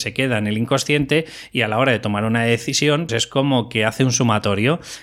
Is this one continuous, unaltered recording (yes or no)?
no